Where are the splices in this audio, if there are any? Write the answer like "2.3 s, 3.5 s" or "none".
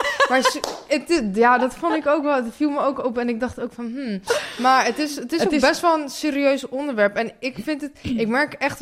none